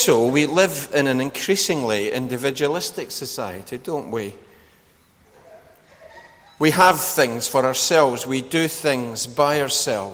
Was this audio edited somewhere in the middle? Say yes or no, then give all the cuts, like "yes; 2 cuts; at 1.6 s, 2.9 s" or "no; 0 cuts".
no; 0 cuts